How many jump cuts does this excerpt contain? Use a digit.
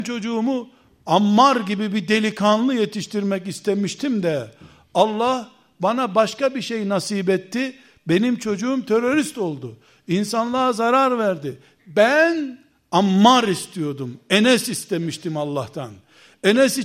1